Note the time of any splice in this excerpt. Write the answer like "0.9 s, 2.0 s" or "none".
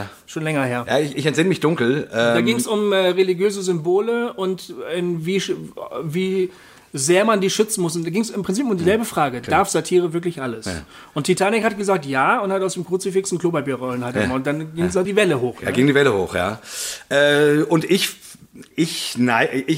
15.0 s